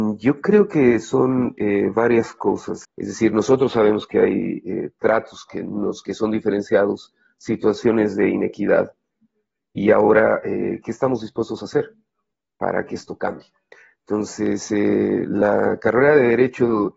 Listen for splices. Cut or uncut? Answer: cut